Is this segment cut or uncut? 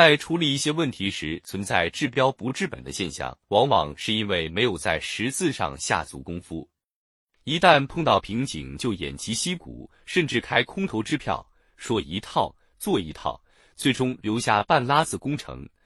cut